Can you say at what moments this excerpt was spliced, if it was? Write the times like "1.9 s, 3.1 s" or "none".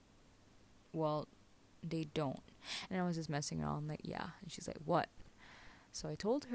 2.9 s